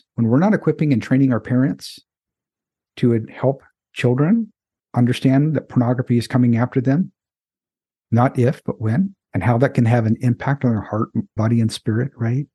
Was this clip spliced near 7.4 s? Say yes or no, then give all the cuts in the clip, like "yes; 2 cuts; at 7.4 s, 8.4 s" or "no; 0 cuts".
no; 2 cuts; at 9.2 s, 11.4 s